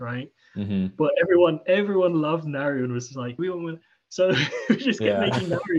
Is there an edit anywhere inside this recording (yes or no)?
yes